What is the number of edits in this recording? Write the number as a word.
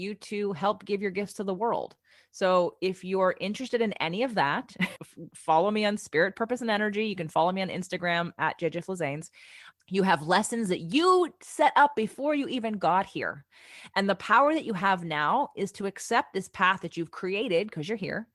two